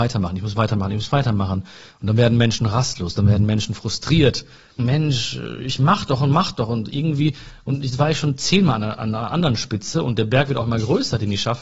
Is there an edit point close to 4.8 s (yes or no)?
yes